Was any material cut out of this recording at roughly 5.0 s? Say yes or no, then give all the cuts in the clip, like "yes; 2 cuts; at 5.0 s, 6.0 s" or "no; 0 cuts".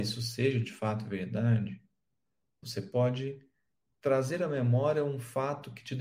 no; 1 cut; at 2.6 s